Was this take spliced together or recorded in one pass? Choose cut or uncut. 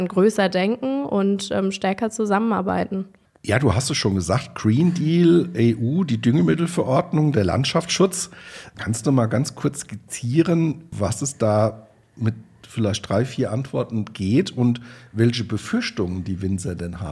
uncut